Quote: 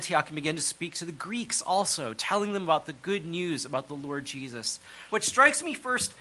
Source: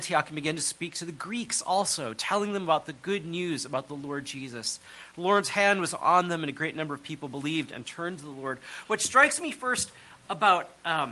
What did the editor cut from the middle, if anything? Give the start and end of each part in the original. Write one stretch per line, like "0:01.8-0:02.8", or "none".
0:05.1-0:08.8